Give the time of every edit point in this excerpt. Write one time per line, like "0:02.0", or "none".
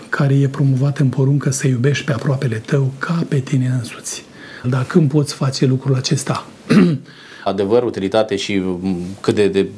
0:04.6
0:07.5